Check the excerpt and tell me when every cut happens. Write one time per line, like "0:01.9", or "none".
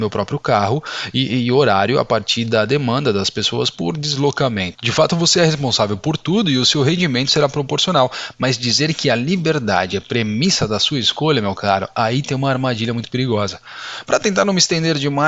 0:04.7